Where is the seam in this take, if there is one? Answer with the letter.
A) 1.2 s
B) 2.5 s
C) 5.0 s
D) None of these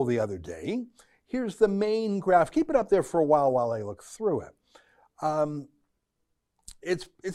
D